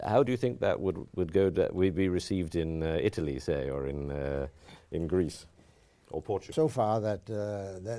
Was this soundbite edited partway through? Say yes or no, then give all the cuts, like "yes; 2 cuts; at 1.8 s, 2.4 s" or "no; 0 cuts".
yes; 1 cut; at 6.5 s